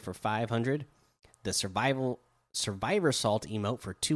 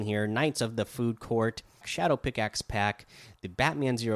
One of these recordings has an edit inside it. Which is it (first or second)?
second